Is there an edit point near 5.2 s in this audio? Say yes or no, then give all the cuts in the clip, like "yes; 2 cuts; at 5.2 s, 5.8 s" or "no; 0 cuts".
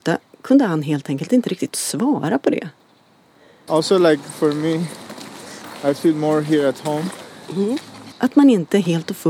no; 2 cuts; at 3.7 s, 8.1 s